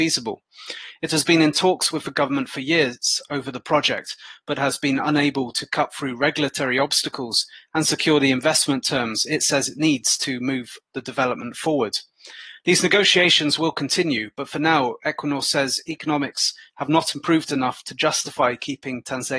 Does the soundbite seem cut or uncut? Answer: uncut